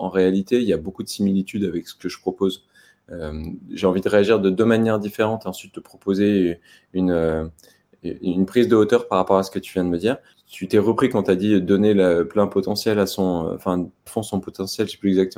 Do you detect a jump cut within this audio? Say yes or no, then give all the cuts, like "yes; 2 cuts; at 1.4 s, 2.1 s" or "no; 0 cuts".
yes; 2 cuts; at 10.3 s, 14.1 s